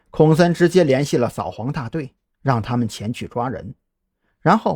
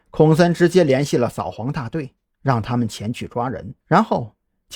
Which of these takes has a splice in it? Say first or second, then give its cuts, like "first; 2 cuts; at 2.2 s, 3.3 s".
second; 1 cut; at 3.8 s